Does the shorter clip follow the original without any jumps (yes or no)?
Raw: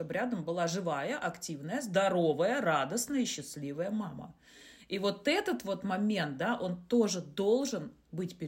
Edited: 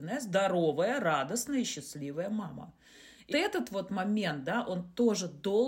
no